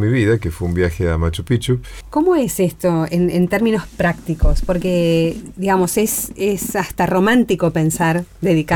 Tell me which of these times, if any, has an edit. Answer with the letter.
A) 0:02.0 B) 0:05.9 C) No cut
A